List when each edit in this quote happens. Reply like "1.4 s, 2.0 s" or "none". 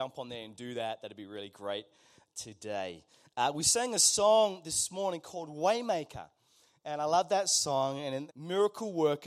8.3 s